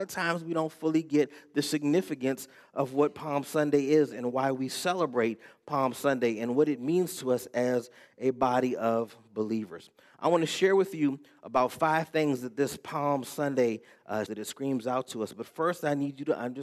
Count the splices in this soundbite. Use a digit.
1